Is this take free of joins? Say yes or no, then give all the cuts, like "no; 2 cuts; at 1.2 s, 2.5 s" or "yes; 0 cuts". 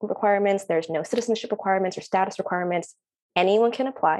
yes; 0 cuts